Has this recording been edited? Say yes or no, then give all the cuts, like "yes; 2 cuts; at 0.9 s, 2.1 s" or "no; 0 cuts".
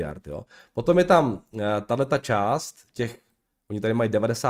no; 0 cuts